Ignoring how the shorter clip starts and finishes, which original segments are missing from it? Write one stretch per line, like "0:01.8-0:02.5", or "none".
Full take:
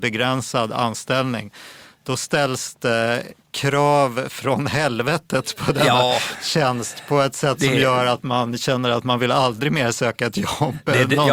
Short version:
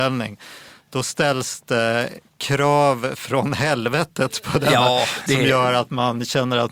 0:06.4-0:07.6